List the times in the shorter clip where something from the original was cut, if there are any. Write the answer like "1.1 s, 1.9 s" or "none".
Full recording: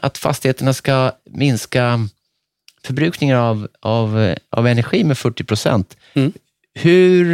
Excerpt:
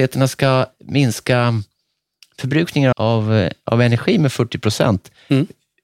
2.9 s